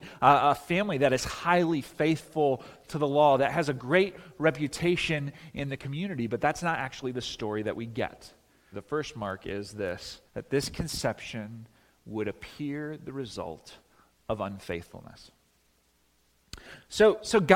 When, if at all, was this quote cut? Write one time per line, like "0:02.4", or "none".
0:08.7
0:10.3